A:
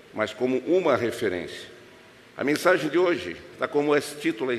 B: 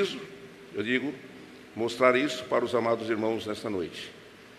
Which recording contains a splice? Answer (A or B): A